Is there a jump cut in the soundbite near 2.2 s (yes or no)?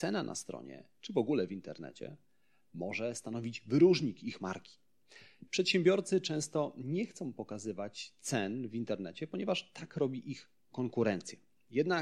no